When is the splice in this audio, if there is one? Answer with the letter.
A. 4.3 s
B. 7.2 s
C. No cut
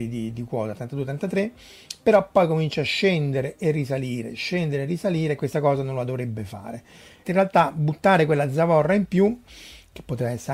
B